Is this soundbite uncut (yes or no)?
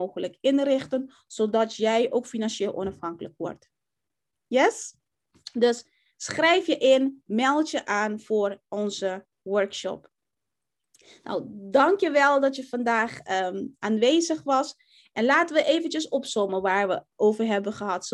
yes